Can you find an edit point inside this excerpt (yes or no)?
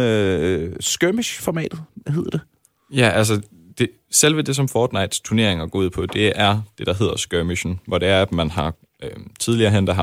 no